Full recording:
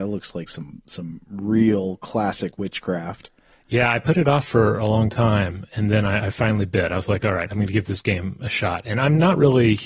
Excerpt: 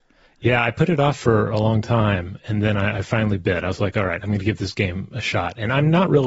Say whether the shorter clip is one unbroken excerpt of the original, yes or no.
yes